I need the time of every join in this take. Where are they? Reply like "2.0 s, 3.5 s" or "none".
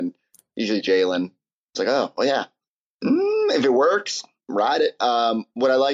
2.9 s